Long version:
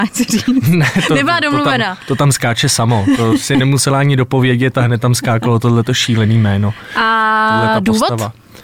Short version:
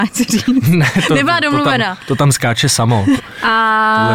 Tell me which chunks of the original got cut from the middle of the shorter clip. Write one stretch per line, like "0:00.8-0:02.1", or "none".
0:03.2-0:06.7